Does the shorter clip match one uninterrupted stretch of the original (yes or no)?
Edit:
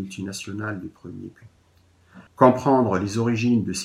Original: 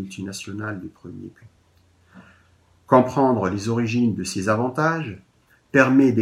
no